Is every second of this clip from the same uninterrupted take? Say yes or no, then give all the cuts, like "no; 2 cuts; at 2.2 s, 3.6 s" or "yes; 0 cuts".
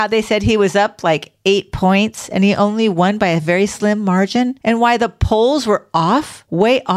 yes; 0 cuts